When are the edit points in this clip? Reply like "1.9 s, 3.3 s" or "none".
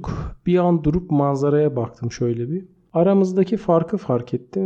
2.9 s